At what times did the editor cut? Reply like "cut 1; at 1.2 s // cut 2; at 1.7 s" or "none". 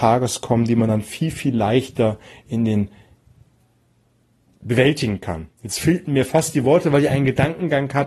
none